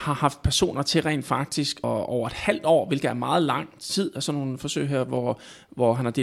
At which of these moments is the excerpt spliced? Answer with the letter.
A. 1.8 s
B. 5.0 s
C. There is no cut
A